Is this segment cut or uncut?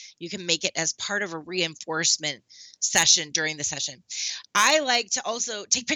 uncut